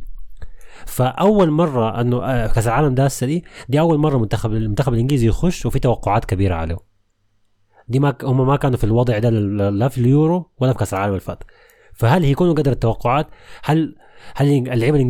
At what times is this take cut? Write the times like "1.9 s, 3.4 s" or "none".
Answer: none